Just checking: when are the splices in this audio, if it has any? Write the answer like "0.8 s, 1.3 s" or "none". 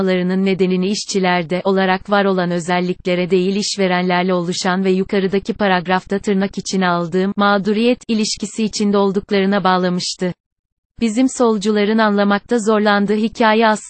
1.6 s